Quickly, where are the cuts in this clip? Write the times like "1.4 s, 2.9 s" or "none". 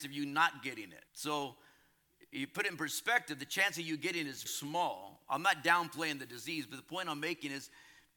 1.1 s, 4.5 s

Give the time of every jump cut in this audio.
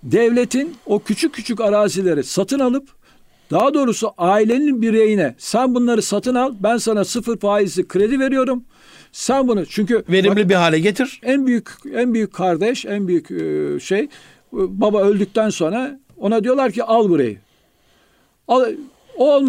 11.2 s

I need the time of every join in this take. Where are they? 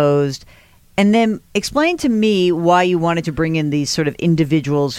1.5 s

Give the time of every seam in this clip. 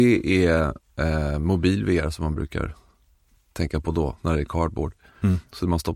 none

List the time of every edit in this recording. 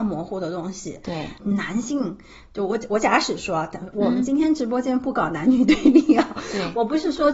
1.4 s

